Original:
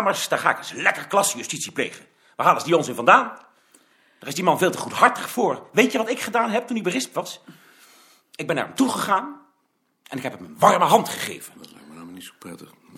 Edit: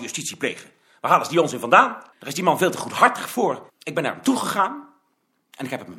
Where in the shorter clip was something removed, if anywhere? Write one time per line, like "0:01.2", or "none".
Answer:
0:02.1
0:03.7